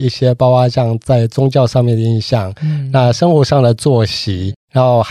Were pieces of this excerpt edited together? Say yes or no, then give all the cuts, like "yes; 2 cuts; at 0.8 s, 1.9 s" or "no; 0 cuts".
no; 0 cuts